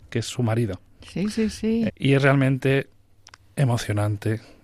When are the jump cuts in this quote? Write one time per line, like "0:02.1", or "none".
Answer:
0:01.9